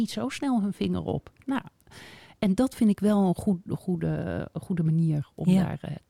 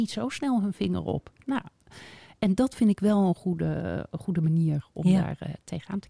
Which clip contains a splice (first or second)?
second